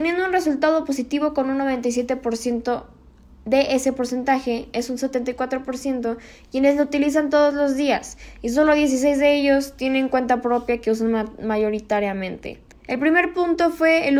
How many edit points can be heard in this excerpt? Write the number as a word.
one